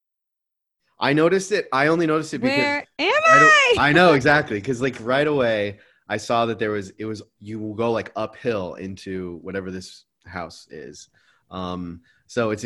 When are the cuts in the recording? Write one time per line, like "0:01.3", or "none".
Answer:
none